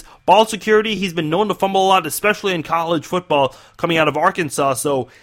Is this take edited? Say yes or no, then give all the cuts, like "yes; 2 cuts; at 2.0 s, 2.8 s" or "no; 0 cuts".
no; 0 cuts